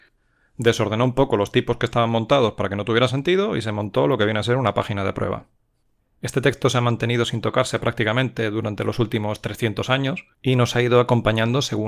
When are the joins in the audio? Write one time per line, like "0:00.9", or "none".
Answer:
0:10.3